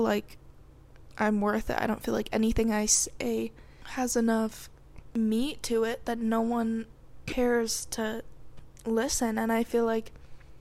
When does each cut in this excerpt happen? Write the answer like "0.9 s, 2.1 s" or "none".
none